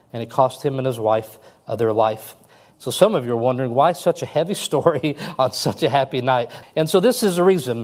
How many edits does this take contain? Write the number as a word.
one